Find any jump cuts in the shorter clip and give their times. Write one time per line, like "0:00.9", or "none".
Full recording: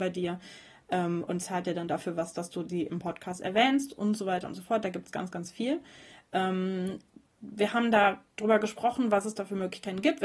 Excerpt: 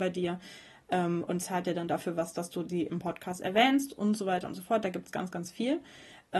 none